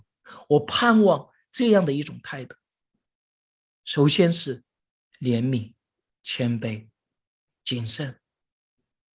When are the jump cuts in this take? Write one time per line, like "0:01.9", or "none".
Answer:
none